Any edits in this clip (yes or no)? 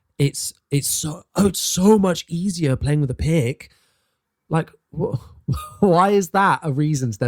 no